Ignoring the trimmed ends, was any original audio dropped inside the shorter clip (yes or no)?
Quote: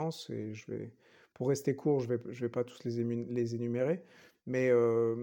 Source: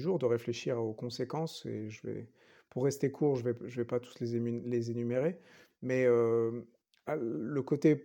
no